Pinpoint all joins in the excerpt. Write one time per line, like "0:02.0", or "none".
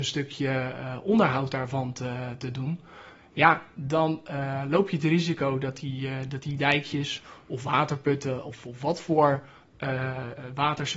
none